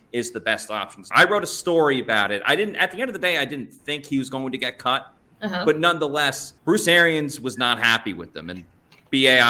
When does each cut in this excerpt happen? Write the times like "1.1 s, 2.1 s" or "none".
1.1 s, 6.6 s